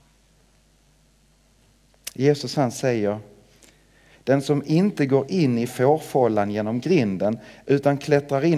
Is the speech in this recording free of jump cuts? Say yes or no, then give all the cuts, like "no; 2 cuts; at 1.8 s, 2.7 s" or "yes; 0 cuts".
no; 1 cut; at 4.1 s